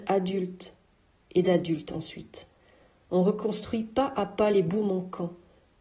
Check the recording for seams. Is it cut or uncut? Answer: uncut